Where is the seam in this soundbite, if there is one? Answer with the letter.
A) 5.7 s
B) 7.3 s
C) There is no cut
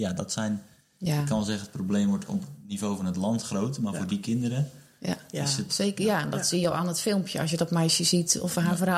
A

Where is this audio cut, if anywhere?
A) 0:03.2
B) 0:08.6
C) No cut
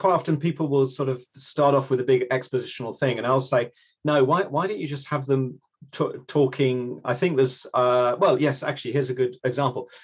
C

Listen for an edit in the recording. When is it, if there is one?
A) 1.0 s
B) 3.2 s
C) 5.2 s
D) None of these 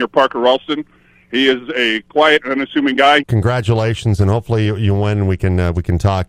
B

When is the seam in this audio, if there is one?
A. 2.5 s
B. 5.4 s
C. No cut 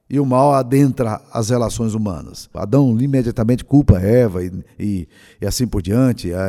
A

